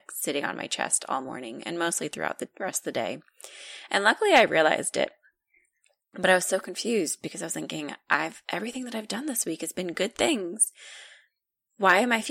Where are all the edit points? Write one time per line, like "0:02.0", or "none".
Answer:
none